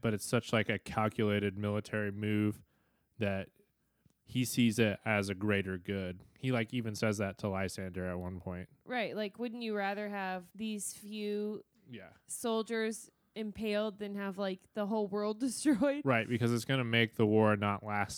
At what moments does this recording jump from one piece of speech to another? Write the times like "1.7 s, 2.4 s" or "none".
10.5 s